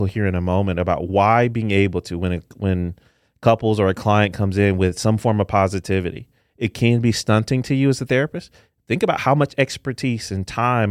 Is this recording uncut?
yes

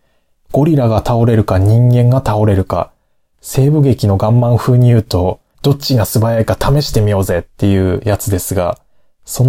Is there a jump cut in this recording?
yes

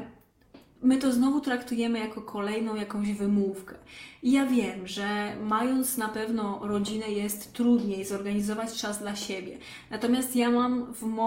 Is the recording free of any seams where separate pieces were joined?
yes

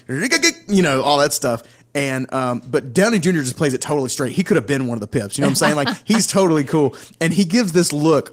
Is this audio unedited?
yes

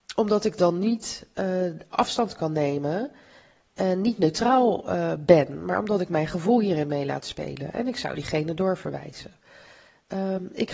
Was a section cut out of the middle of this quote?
no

